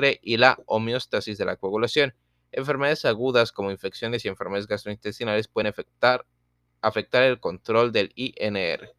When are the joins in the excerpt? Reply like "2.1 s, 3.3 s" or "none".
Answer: none